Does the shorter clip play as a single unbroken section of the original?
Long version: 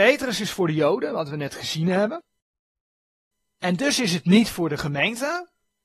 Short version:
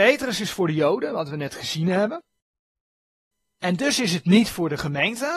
yes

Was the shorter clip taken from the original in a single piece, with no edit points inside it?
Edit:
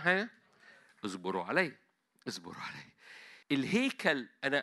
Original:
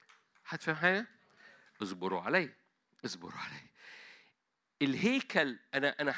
no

